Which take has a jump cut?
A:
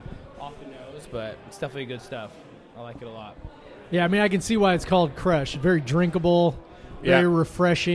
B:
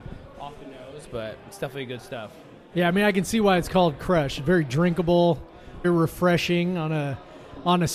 B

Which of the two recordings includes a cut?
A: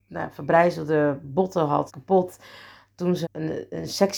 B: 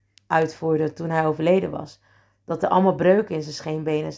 A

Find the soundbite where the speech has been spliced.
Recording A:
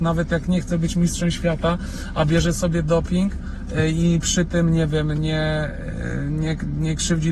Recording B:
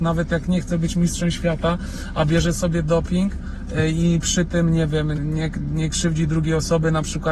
B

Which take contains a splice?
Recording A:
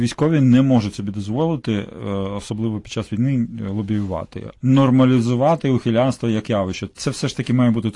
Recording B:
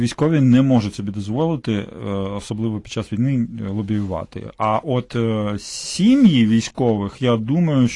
A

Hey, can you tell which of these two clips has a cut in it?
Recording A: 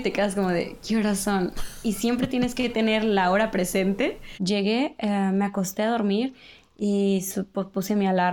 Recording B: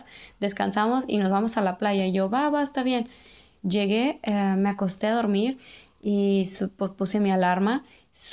A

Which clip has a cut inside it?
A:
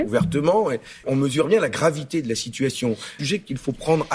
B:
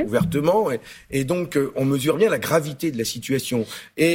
A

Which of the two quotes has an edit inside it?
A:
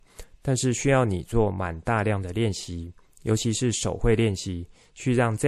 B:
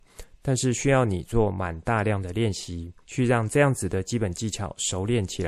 B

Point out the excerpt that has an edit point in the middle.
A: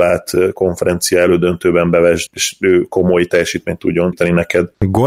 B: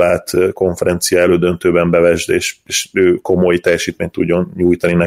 A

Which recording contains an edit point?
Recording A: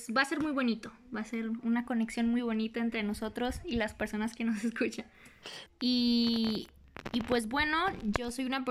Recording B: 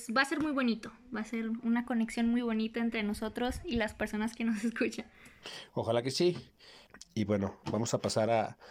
A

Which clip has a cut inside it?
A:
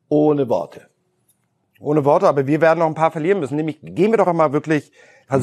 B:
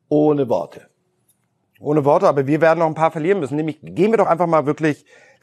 A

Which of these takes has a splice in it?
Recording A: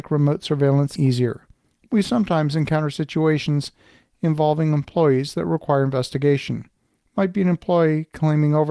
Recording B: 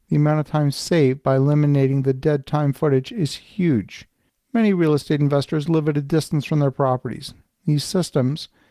A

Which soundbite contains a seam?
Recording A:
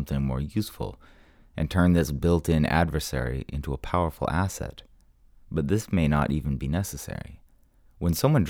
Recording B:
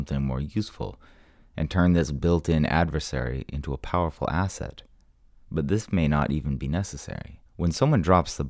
B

